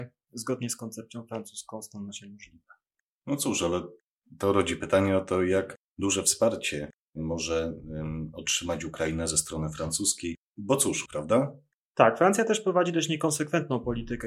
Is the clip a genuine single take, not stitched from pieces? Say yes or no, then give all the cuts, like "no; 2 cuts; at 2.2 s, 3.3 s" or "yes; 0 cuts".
no; 1 cut; at 11.1 s